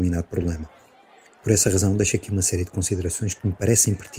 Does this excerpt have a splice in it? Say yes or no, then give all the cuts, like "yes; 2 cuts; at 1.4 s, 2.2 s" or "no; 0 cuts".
no; 0 cuts